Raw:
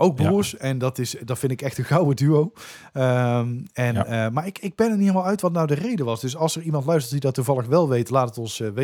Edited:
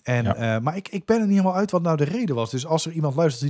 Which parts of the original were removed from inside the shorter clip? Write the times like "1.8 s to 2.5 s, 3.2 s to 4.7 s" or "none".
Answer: none